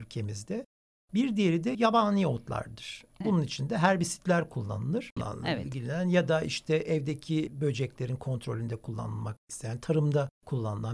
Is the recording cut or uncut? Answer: cut